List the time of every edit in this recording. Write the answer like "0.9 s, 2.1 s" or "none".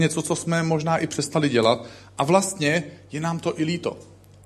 none